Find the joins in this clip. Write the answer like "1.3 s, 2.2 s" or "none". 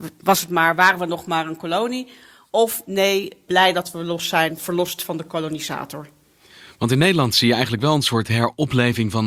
none